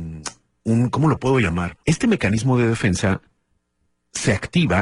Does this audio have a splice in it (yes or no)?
yes